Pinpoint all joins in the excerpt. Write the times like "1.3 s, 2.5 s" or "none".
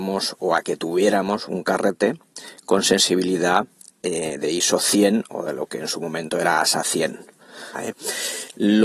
7.7 s